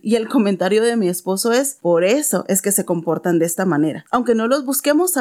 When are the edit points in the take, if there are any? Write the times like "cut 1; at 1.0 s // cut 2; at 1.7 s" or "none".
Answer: cut 1; at 4.1 s